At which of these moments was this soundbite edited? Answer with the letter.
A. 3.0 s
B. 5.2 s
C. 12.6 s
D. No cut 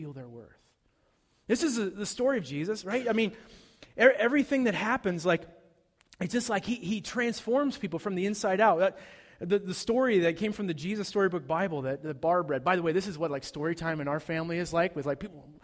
D